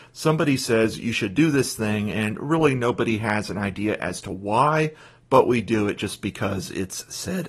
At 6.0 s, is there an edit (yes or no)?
no